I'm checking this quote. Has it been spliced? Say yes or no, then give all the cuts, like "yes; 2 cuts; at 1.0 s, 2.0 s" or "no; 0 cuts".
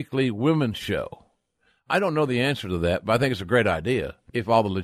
no; 0 cuts